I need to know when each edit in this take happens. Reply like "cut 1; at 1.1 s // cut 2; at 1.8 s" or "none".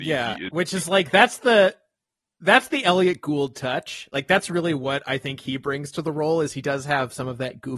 none